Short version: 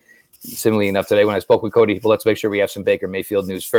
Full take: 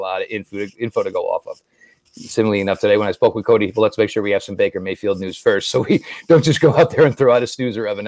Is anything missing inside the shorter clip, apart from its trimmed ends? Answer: no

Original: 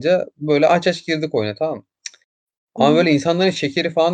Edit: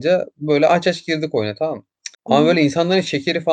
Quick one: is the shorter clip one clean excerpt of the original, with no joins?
no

